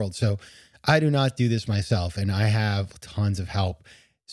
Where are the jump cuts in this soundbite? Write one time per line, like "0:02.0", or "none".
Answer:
none